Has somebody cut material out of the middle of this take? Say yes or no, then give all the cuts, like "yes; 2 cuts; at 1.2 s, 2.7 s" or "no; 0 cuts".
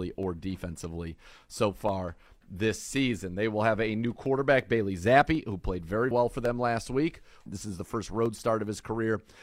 yes; 2 cuts; at 6.1 s, 7.5 s